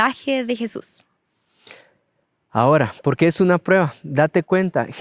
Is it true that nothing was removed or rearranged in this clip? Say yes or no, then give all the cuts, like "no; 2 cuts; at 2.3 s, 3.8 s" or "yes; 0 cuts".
yes; 0 cuts